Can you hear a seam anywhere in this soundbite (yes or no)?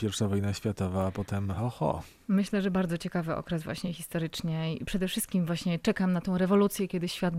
no